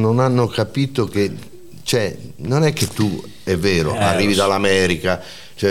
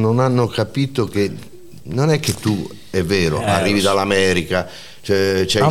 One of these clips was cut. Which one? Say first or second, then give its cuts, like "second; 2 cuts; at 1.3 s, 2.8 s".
second; 1 cut; at 1.8 s